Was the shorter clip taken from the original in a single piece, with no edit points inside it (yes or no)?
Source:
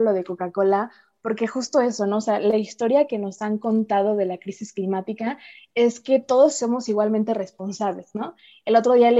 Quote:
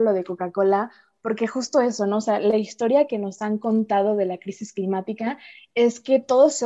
yes